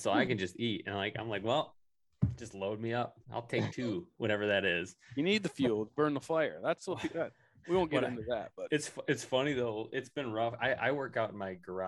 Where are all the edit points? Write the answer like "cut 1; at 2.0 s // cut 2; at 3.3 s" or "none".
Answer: cut 1; at 3.2 s